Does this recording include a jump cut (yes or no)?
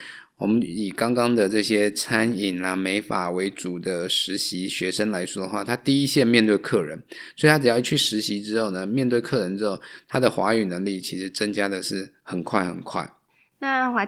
no